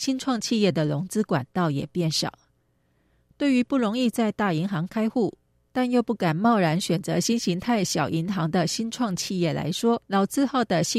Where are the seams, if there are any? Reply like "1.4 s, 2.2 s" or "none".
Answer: 10.1 s